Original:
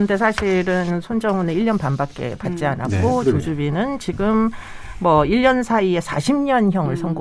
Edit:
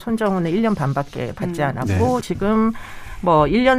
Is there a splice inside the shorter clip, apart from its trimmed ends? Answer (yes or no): yes